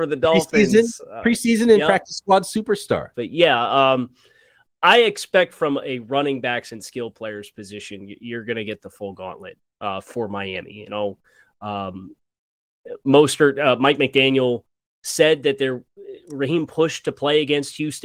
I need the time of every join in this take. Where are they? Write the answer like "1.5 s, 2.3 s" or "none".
3.1 s